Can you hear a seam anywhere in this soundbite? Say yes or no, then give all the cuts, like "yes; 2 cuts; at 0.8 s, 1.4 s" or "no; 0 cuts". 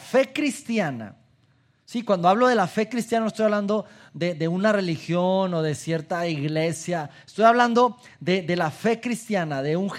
no; 0 cuts